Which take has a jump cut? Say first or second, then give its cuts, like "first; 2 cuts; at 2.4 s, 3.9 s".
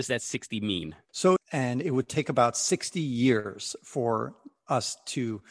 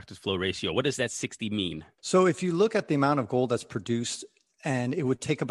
first; 1 cut; at 1.4 s